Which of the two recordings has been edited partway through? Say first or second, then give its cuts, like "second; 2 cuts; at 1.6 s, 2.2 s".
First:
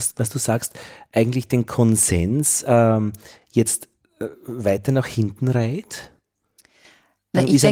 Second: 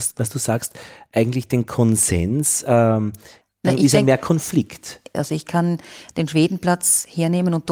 second; 2 cuts; at 3.4 s, 5.1 s